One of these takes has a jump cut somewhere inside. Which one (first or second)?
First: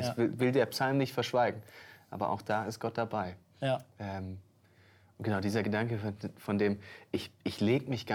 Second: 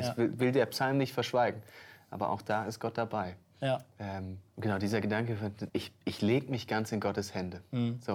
second